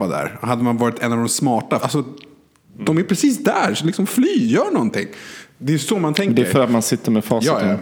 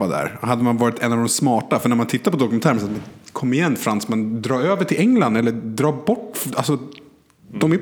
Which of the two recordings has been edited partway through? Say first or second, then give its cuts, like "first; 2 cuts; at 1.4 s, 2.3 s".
first; 1 cut; at 1.8 s